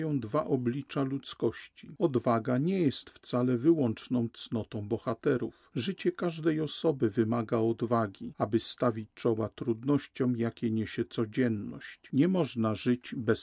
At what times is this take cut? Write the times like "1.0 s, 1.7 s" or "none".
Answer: none

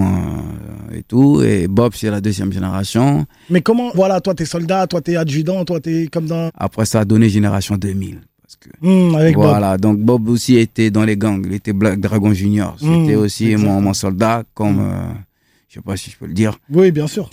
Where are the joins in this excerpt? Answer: 3.9 s, 6.5 s

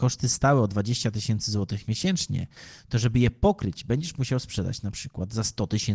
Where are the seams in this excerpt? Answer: none

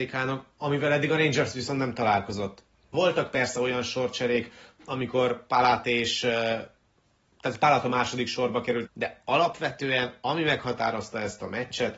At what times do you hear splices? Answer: 2.9 s, 8.9 s

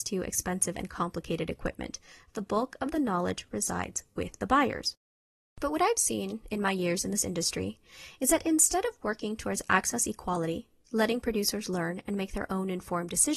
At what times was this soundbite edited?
none

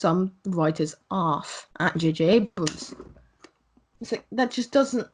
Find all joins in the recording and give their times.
1.7 s, 4.0 s

